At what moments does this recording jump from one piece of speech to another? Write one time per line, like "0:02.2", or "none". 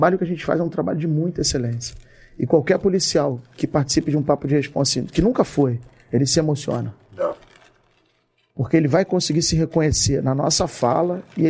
none